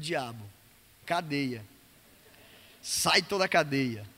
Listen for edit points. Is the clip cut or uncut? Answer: cut